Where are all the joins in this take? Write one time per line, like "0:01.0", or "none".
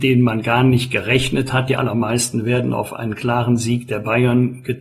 none